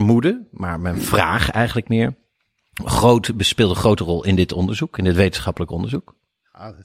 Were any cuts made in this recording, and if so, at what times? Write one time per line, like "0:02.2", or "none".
none